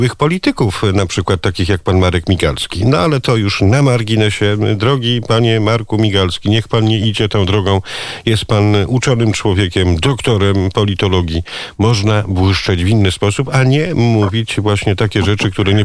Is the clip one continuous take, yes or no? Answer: yes